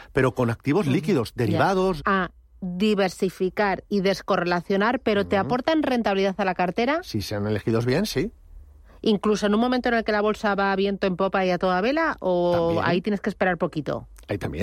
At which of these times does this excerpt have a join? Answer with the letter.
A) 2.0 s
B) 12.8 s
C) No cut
A